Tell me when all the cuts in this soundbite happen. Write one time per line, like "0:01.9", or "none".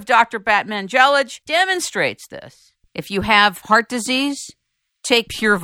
0:02.8